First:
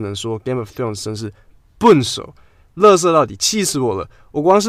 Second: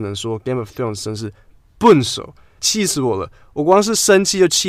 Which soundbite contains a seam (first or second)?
second